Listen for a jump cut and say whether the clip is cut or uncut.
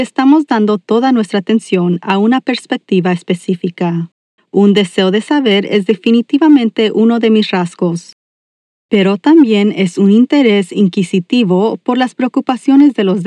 cut